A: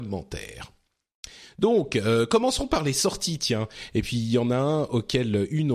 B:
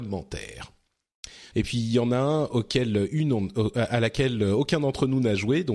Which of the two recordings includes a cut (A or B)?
B